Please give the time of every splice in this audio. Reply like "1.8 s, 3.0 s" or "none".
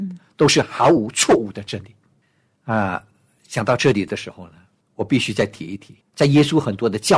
6.0 s